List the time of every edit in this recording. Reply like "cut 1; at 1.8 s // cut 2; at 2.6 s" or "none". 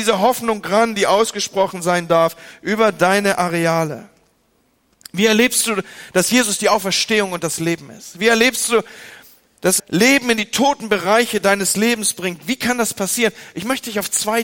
cut 1; at 9.8 s